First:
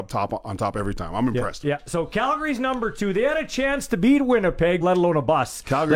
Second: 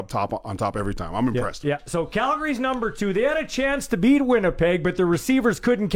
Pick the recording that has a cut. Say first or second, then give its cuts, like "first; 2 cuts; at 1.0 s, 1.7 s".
first; 1 cut; at 4.8 s